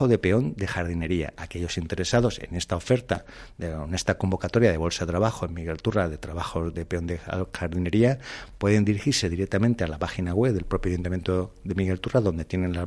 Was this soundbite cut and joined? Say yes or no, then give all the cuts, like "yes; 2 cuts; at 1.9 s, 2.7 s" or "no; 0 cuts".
yes; 1 cut; at 1.4 s